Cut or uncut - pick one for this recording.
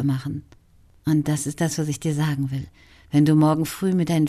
cut